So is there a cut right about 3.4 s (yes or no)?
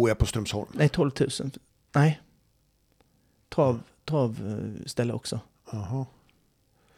no